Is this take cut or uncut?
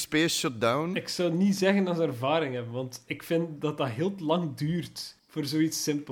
cut